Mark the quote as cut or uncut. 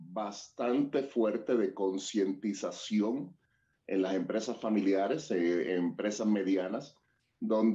uncut